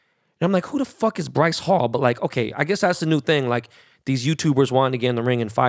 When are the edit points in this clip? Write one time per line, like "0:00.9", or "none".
none